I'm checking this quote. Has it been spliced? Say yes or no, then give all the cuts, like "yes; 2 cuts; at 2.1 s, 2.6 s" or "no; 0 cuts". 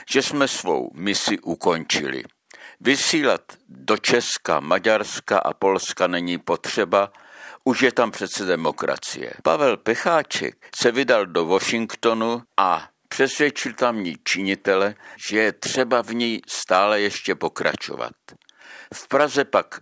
yes; 2 cuts; at 9.4 s, 15.2 s